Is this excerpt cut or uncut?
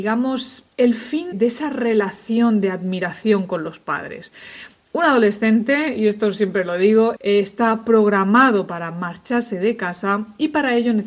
cut